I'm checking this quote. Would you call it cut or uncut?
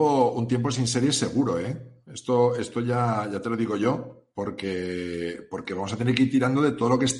uncut